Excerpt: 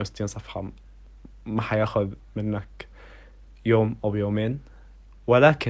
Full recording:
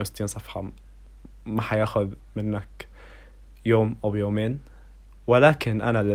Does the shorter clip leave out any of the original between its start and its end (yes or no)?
no